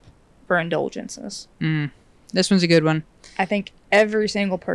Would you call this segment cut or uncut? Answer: uncut